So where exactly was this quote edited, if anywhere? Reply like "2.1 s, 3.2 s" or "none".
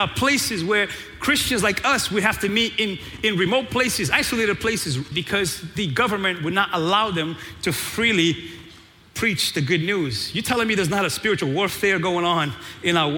5.1 s